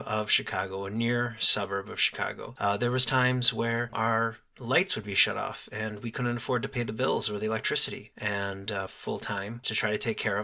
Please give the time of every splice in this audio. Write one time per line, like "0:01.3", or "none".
0:02.6
0:03.9
0:08.9